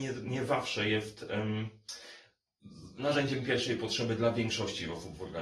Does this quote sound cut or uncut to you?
uncut